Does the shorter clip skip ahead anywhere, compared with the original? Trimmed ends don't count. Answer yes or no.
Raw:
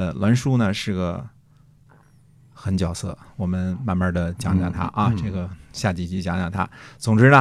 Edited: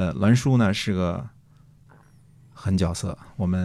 no